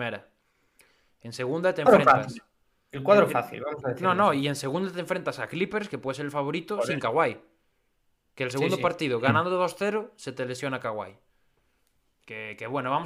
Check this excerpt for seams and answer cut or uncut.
uncut